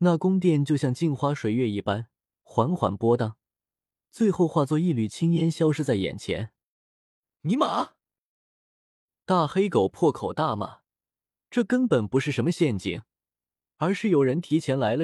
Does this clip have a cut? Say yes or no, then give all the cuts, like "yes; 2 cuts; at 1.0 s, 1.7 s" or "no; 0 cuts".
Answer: no; 0 cuts